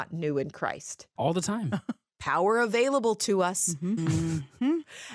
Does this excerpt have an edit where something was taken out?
yes; 2 cuts; at 1.2 s, 4.0 s

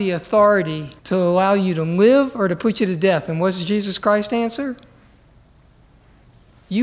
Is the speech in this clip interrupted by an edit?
yes; 1 cut; at 1.0 s

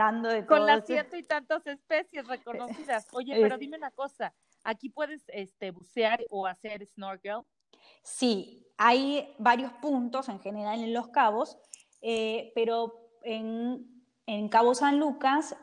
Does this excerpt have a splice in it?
no; 0 cuts

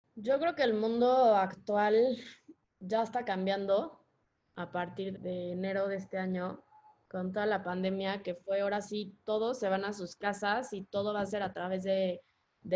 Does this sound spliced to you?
yes; 1 cut; at 5.1 s

